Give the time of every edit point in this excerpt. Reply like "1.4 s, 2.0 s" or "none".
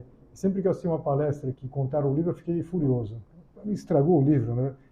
1.5 s